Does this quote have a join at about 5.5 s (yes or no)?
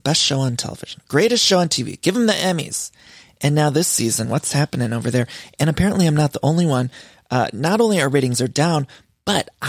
no